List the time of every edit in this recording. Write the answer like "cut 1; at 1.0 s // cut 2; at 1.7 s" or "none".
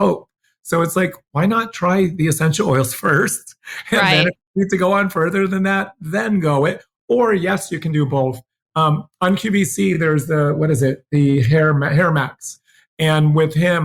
none